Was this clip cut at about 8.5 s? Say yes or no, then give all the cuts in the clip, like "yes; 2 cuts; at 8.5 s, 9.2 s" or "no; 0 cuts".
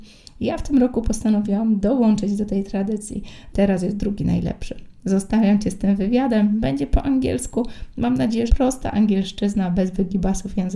yes; 2 cuts; at 3.5 s, 8.5 s